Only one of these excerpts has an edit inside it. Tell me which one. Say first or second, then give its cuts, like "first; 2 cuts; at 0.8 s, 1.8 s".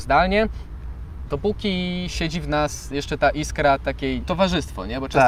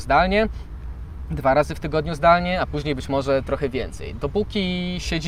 first; 2 cuts; at 1.3 s, 4.2 s